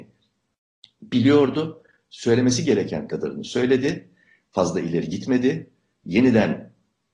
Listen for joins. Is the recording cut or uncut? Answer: uncut